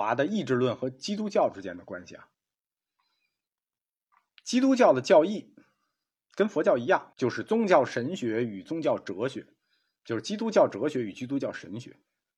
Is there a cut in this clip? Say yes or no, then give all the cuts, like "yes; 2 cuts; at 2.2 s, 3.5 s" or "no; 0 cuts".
yes; 1 cut; at 7.1 s